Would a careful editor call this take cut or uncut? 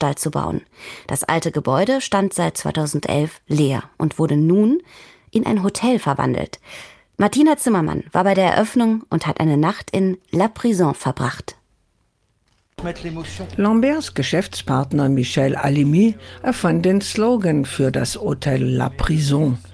uncut